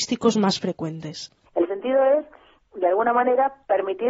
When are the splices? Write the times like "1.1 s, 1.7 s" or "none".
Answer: 1.5 s